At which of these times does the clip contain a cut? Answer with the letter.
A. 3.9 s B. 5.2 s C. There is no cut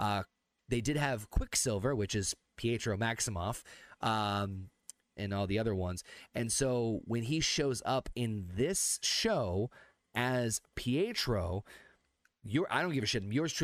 B